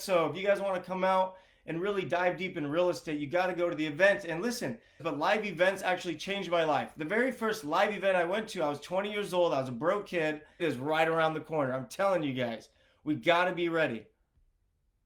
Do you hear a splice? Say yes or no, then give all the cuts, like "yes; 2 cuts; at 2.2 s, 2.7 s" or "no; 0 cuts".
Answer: yes; 2 cuts; at 5.0 s, 10.6 s